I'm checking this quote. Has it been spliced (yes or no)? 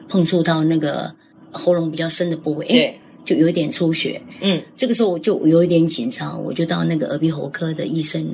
no